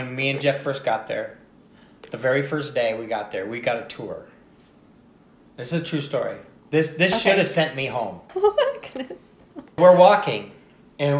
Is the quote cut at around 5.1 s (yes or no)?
no